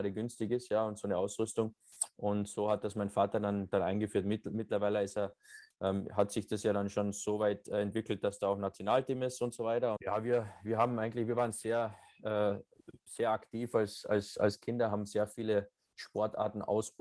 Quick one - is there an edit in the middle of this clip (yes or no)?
yes